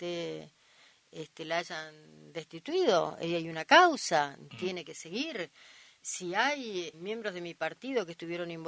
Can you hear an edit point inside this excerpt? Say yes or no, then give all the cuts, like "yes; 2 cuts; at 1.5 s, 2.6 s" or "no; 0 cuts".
yes; 1 cut; at 6.9 s